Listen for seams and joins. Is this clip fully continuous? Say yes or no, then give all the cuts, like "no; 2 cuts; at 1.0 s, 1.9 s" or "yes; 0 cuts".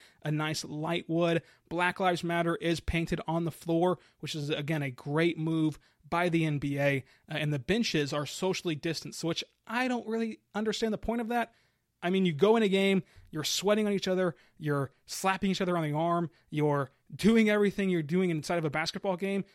yes; 0 cuts